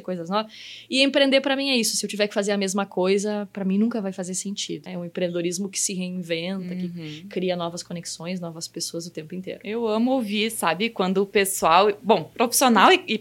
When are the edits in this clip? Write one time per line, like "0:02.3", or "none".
0:04.9